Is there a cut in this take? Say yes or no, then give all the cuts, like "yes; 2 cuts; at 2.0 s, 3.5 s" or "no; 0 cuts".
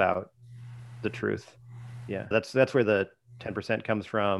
yes; 1 cut; at 2.1 s